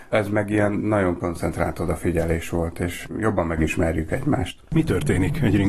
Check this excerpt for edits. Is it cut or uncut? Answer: uncut